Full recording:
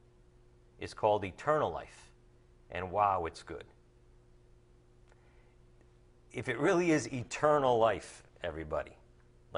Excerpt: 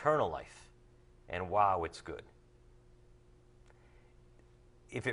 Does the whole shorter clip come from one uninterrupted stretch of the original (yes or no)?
yes